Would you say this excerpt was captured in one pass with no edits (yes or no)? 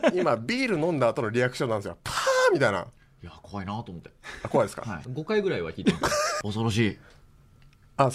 no